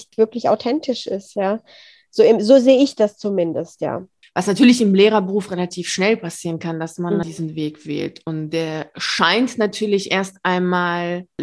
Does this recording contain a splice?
yes; 2 cuts; at 4.2 s, 7.2 s

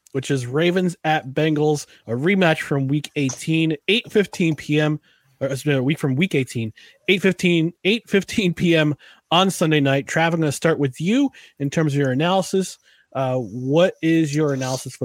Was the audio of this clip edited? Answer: no; 0 cuts

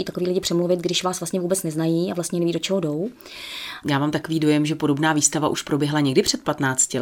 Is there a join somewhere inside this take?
yes; 1 cut; at 3.8 s

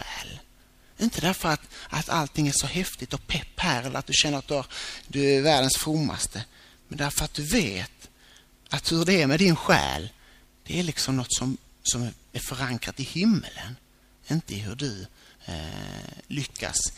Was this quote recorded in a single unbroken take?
yes; 0 cuts

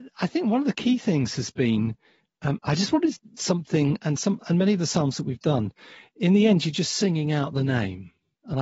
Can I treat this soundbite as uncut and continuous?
yes; 0 cuts

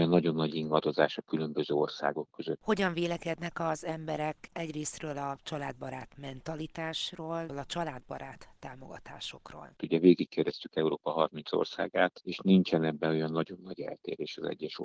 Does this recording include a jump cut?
yes; 3 cuts; at 2.6 s, 7.5 s, 9.8 s

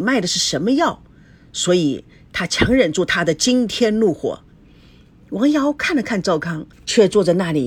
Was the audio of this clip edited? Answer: yes; 1 cut; at 6.7 s

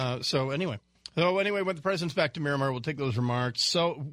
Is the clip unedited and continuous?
yes; 0 cuts

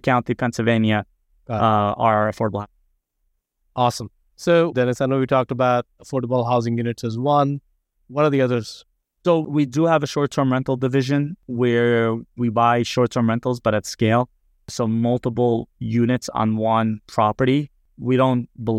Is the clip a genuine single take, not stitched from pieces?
no; 1 cut; at 4.7 s

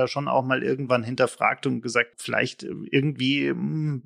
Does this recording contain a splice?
yes; 1 cut; at 2.1 s

